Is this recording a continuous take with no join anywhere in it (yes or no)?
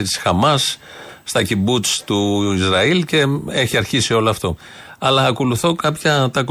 yes